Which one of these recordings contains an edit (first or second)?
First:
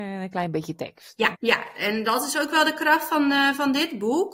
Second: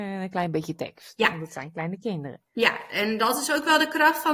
first